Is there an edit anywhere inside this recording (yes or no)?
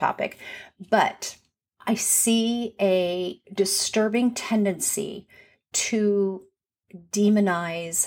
no